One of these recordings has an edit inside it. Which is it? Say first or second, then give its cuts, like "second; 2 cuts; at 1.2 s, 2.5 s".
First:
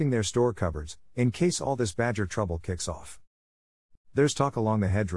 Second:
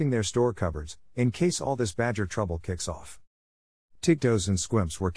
first; 1 cut; at 4.0 s